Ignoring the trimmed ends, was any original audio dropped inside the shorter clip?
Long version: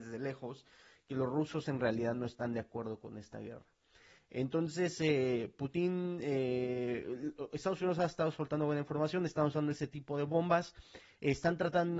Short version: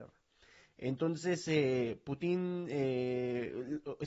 no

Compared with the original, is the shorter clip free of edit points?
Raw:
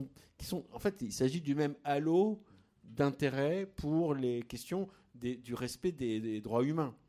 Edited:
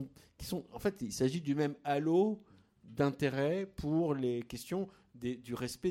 yes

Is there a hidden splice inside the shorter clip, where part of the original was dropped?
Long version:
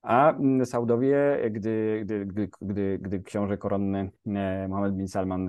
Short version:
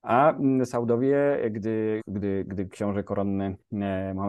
yes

